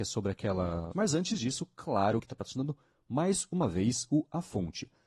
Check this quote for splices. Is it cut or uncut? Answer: cut